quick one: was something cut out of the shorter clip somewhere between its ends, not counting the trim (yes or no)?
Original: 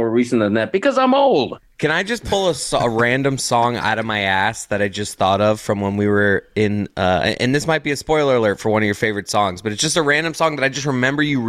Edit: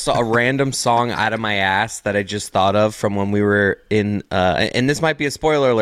no